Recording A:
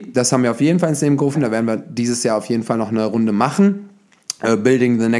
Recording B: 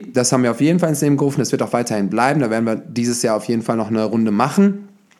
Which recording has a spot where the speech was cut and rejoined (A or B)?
A